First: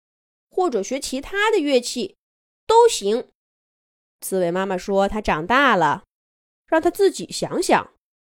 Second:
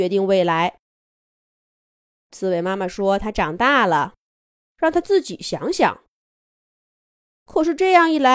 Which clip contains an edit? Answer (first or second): first